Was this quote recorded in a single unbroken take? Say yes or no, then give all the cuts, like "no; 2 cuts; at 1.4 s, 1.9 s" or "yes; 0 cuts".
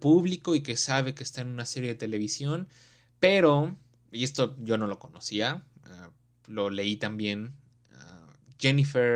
yes; 0 cuts